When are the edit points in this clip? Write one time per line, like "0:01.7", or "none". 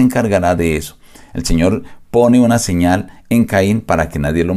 none

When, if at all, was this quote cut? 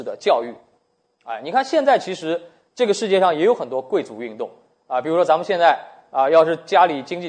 none

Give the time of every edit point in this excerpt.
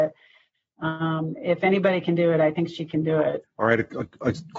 0:03.4

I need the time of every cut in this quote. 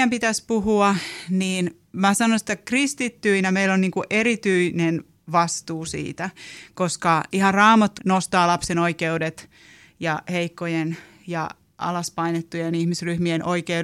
0:08.0

